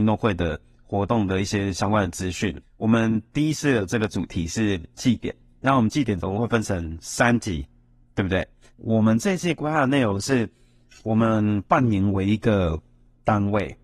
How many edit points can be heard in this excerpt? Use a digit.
2